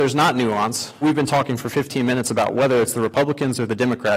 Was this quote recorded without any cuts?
no; 1 cut; at 1.0 s

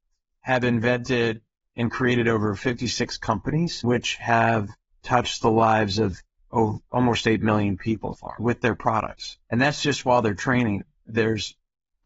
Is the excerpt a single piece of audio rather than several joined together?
no; 1 cut; at 8.1 s

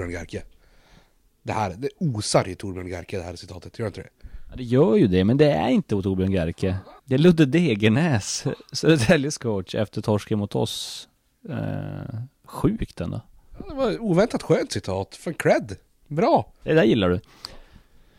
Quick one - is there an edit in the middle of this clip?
yes; 2 cuts; at 7.0 s, 16.6 s

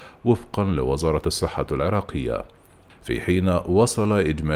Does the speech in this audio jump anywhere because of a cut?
yes; 1 cut; at 2.9 s

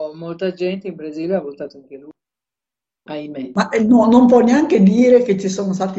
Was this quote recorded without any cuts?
yes; 0 cuts

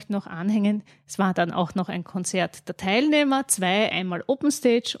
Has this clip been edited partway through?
yes; 1 cut; at 3.9 s

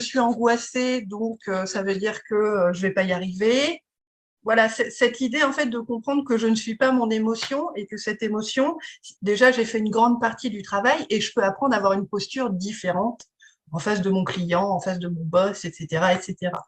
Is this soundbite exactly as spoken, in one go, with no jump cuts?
no; 2 cuts; at 4.4 s, 9.2 s

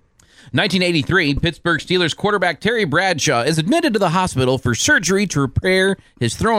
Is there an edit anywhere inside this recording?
no; 0 cuts

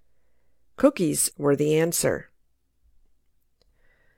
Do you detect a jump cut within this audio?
yes; 1 cut; at 1.3 s

